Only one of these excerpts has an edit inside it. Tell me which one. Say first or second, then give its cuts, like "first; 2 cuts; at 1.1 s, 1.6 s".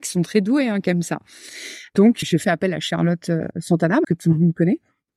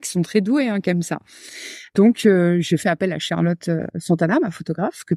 first; 2 cuts; at 2.2 s, 4.0 s